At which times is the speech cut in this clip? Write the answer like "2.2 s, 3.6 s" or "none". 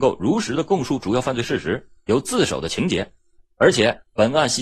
none